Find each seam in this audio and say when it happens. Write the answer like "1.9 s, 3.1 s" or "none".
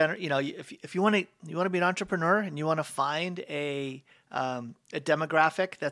none